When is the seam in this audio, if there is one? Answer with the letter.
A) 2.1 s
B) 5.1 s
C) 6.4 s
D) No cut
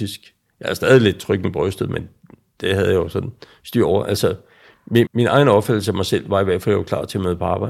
B